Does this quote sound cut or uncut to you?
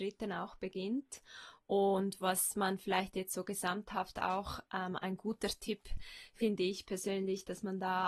uncut